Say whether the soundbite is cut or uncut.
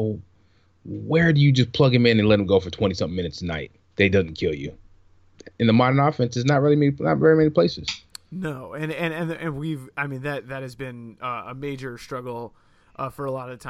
uncut